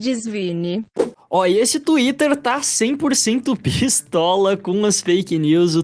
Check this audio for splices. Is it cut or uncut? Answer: uncut